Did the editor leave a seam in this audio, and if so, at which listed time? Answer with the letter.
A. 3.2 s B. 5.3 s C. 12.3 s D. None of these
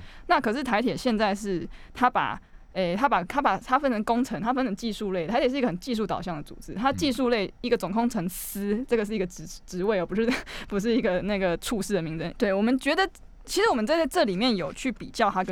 C